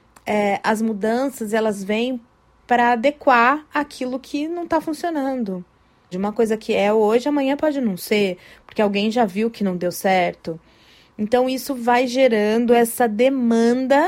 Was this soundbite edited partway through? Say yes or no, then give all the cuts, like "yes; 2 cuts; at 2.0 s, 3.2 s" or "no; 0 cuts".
yes; 1 cut; at 6.1 s